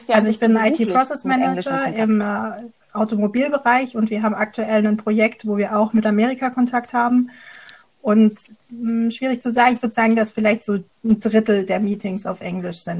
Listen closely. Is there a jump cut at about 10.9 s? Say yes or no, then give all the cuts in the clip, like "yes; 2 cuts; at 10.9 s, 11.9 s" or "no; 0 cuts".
yes; 1 cut; at 10.9 s